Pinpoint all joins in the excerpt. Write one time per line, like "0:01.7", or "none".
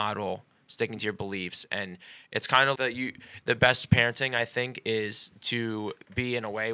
0:02.7